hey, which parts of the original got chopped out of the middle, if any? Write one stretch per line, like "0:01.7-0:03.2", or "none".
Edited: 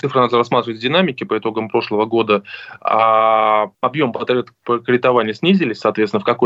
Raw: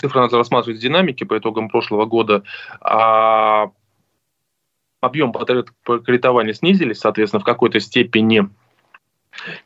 0:03.7-0:04.9